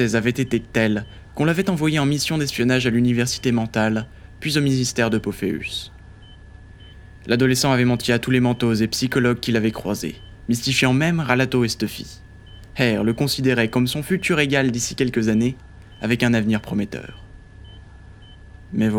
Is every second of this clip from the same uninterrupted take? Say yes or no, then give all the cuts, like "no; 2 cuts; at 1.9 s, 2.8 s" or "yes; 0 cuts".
yes; 0 cuts